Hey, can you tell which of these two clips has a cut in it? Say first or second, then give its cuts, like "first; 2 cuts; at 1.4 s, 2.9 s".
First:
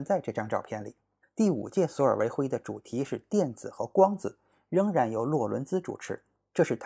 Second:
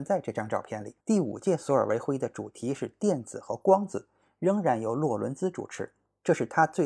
second; 1 cut; at 1.0 s